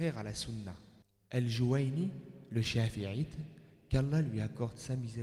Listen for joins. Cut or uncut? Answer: cut